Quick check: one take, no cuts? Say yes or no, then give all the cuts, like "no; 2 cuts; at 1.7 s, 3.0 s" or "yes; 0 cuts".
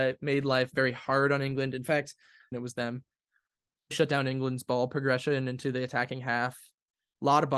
no; 2 cuts; at 2.5 s, 3.9 s